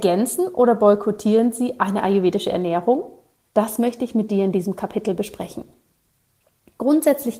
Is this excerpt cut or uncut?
uncut